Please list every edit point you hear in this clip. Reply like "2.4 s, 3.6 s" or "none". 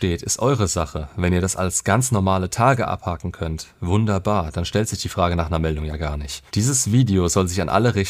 6.5 s

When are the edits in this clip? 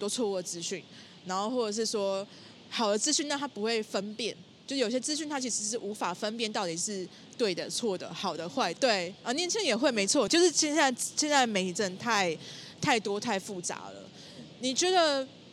8.8 s, 10.3 s

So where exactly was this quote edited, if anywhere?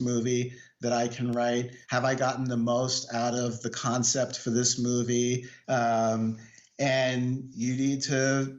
1.8 s, 5.6 s

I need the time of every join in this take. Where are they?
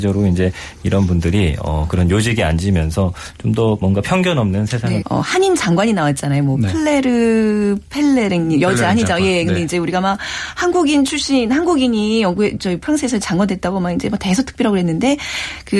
5.0 s

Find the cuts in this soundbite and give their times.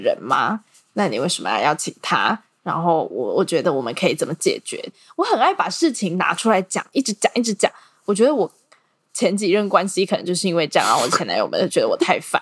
none

